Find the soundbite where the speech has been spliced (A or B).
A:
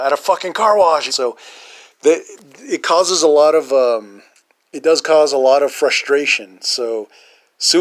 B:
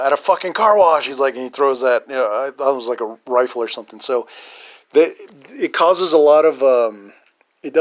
A